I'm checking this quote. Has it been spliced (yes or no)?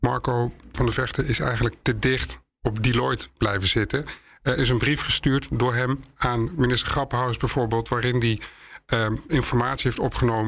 yes